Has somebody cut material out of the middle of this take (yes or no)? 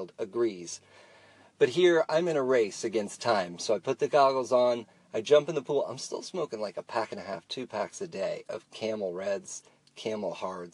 no